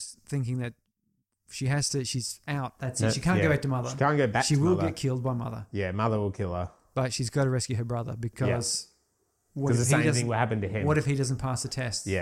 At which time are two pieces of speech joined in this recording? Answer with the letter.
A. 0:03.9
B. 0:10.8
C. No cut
C